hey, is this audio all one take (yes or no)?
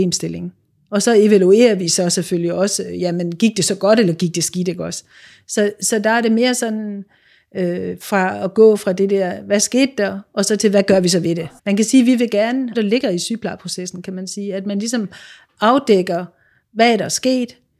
no